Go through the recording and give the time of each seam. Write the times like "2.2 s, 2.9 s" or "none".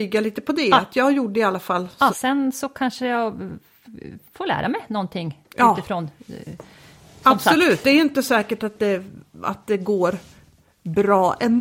2.1 s